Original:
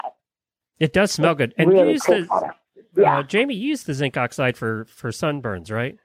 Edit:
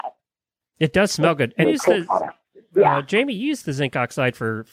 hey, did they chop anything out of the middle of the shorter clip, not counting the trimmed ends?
yes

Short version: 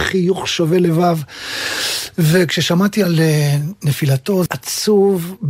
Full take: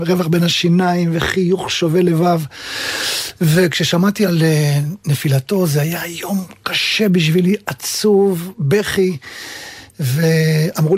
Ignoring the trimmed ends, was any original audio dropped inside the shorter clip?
yes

